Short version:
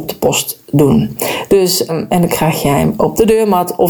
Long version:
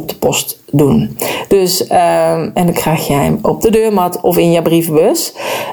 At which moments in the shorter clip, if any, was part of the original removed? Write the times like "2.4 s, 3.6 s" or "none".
1.9 s